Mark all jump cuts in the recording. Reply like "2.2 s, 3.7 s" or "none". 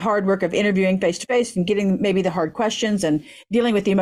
none